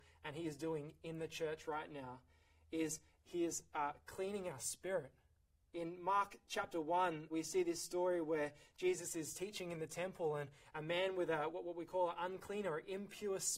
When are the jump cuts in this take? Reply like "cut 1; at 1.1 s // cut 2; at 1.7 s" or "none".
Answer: cut 1; at 5.7 s // cut 2; at 7.3 s // cut 3; at 11.5 s